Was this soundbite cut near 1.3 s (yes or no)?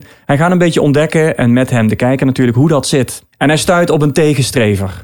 no